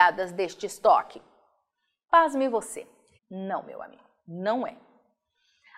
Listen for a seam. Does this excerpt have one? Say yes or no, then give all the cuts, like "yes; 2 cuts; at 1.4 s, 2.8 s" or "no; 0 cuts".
yes; 1 cut; at 3.2 s